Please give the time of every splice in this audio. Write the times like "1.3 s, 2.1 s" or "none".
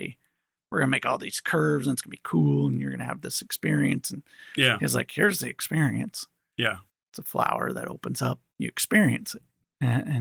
none